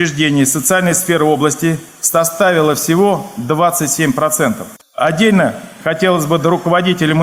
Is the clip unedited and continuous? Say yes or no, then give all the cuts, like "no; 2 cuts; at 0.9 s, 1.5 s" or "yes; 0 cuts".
no; 1 cut; at 4.8 s